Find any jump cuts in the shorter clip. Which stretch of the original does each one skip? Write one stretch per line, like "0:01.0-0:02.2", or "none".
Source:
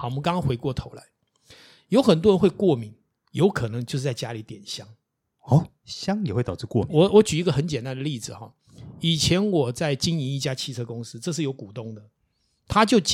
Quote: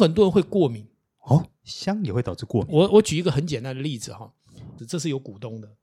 0:03.1-0:05.3
0:09.0-0:11.1